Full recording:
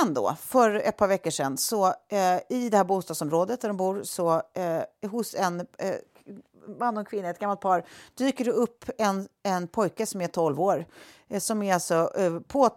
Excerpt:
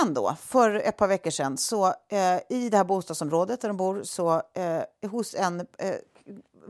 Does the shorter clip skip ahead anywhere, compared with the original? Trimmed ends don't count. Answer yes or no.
no